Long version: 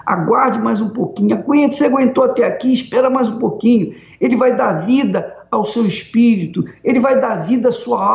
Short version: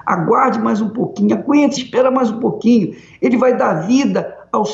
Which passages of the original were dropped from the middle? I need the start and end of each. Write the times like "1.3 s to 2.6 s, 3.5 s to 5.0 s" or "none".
1.8 s to 2.8 s